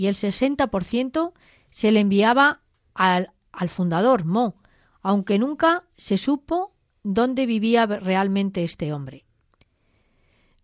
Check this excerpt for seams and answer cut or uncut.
uncut